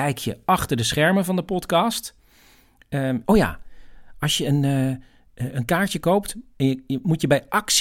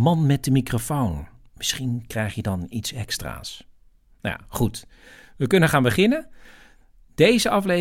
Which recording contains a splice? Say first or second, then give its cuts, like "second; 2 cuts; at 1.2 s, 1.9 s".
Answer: first; 1 cut; at 3.2 s